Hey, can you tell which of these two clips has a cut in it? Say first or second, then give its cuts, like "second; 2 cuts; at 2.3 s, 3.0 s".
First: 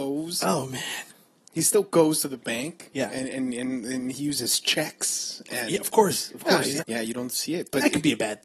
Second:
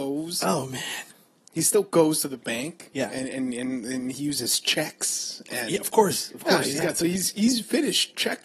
first; 1 cut; at 6.8 s